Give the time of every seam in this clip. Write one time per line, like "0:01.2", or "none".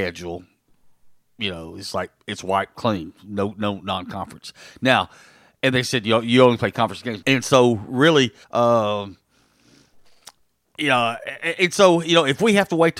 0:07.2
0:08.4